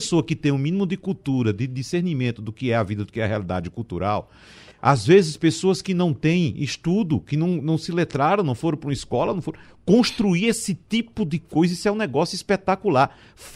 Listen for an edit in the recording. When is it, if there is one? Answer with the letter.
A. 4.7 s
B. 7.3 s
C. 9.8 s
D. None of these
A